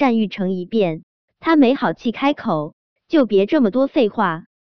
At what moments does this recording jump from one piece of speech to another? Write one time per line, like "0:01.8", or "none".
0:01.2
0:02.9